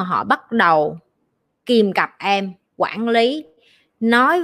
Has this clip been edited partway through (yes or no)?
no